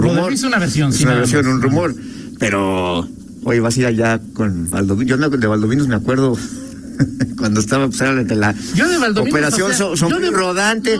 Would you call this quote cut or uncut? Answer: uncut